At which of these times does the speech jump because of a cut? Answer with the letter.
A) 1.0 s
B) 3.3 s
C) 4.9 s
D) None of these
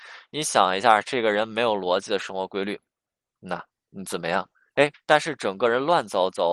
C